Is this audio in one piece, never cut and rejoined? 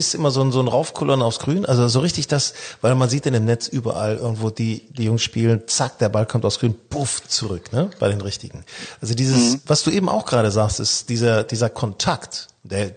yes; 0 cuts

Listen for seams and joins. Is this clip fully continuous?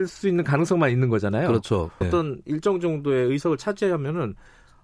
no; 1 cut; at 2.0 s

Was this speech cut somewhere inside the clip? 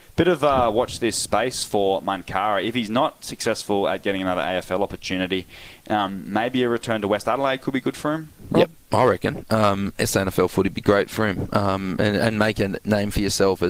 no; 0 cuts

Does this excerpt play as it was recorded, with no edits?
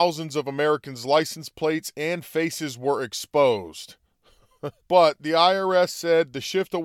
no; 1 cut; at 4.8 s

